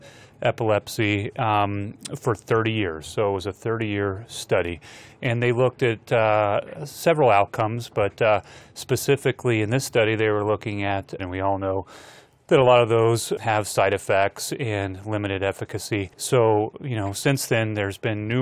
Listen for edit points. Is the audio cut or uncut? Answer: cut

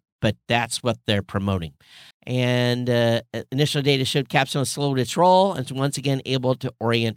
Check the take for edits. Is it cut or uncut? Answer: cut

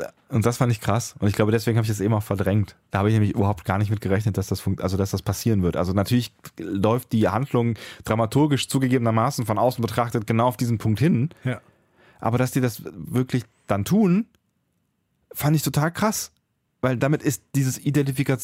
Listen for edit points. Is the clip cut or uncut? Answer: uncut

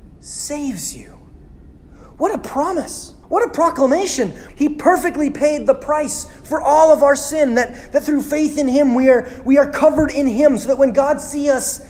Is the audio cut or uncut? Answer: cut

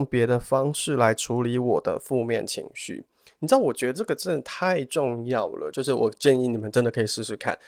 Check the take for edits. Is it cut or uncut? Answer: uncut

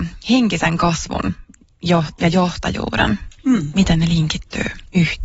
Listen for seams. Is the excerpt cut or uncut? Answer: cut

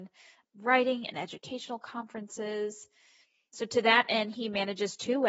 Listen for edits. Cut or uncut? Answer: uncut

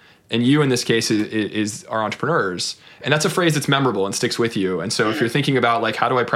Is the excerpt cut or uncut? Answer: uncut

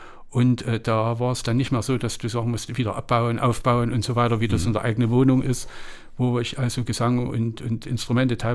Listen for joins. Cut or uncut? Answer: uncut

